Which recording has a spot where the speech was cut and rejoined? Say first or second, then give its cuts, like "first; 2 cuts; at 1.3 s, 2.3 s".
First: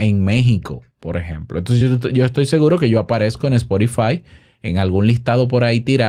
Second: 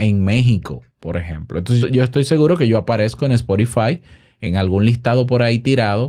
second; 1 cut; at 1.8 s